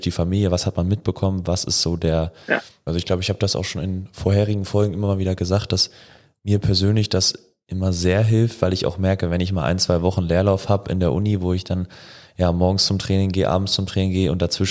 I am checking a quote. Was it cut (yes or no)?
yes